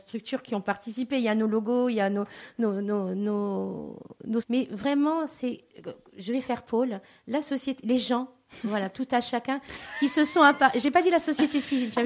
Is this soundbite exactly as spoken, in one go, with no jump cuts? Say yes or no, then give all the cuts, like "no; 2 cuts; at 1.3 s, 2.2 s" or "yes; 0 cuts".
no; 1 cut; at 4.4 s